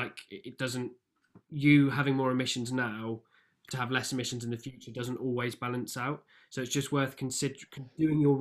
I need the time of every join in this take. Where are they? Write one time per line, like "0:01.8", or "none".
none